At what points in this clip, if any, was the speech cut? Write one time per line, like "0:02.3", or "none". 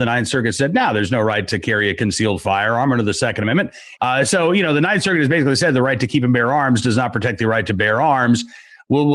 0:04.0